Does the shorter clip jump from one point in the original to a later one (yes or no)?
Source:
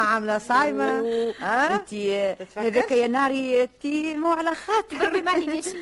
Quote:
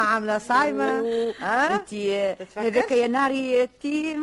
no